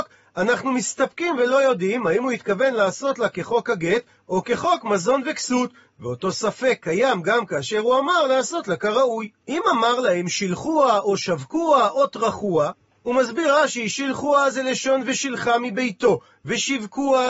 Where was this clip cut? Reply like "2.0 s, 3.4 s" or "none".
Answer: 9.4 s